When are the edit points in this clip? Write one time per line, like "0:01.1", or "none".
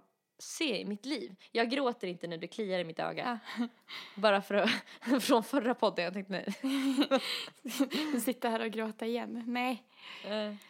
none